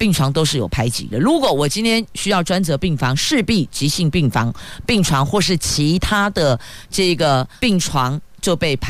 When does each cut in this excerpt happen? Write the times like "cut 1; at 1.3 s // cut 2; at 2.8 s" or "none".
cut 1; at 1.1 s // cut 2; at 7.6 s